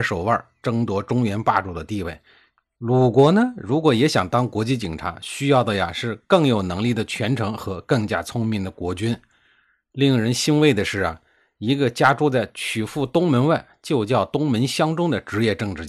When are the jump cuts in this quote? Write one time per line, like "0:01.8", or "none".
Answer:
0:02.8